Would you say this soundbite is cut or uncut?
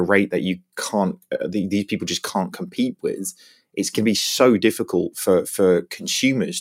uncut